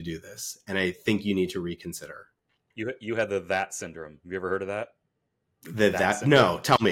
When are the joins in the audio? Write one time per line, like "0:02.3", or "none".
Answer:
none